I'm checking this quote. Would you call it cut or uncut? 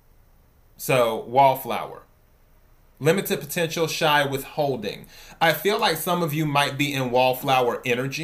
uncut